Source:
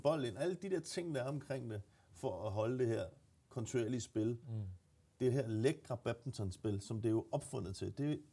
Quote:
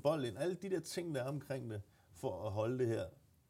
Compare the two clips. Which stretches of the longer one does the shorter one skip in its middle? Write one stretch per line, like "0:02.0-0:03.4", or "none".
none

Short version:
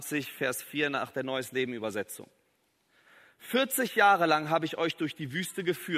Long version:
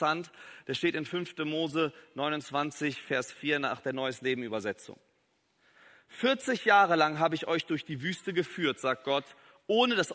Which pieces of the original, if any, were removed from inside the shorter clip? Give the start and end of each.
none

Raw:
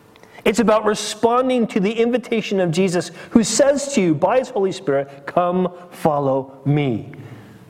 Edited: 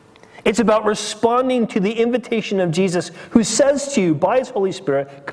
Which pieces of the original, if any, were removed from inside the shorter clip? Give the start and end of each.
none

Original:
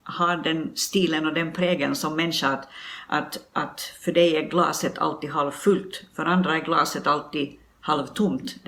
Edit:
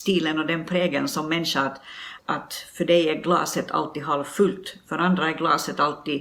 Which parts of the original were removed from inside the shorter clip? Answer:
0:03.1-0:03.5

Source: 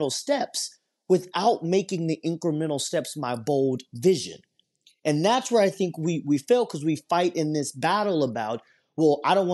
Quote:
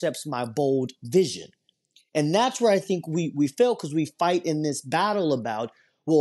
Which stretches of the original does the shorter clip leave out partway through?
none

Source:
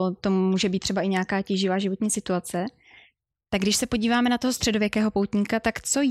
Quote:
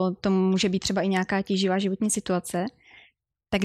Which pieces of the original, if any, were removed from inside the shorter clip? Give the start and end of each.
none

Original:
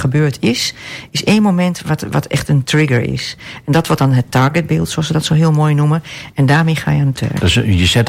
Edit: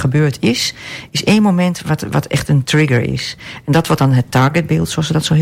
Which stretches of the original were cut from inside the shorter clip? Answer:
none

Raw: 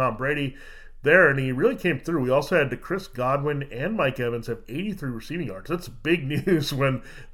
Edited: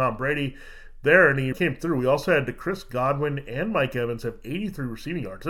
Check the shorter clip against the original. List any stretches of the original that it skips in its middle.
0:01.5-0:01.8

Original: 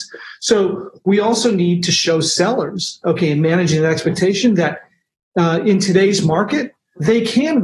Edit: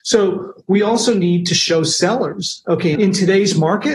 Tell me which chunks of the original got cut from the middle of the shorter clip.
0:03.3-0:05.6

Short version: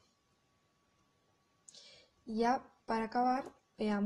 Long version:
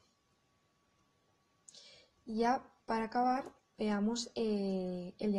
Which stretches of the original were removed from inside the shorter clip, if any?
none

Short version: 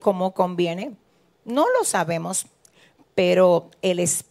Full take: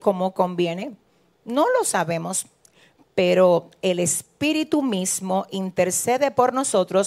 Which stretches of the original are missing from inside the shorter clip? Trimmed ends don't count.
none

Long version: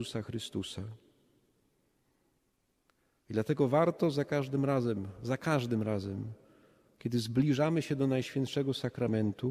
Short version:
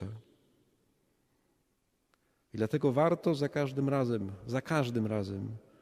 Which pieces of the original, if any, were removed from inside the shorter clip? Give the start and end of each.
none

